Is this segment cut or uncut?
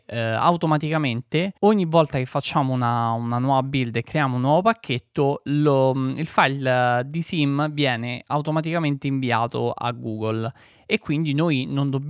cut